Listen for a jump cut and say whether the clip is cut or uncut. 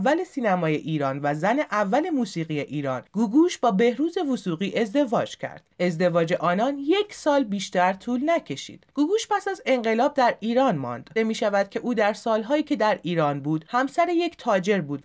cut